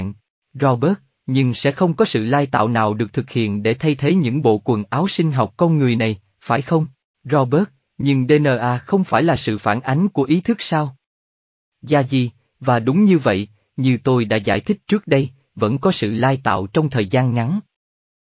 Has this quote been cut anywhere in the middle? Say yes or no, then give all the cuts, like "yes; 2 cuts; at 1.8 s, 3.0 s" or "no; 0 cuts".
yes; 3 cuts; at 7.1 s, 11.7 s, 13.6 s